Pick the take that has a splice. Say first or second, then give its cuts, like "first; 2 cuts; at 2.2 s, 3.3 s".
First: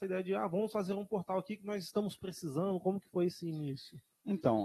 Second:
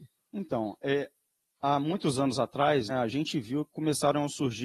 second; 1 cut; at 2.9 s